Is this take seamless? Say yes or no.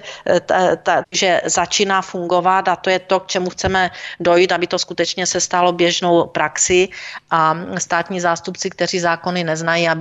no